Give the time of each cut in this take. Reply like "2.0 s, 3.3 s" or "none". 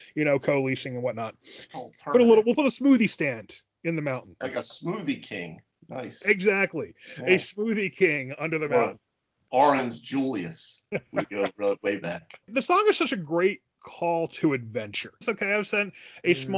4.4 s, 15.2 s